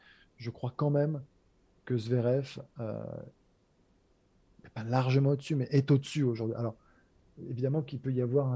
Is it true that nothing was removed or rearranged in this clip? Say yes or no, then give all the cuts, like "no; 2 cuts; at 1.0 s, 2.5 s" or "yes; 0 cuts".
yes; 0 cuts